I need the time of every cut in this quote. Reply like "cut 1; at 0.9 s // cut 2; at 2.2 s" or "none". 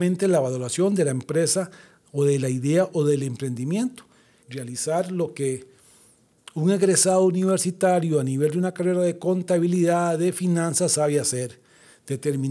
cut 1; at 4.4 s